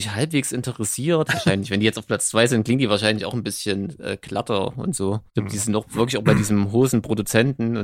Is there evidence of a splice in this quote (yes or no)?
yes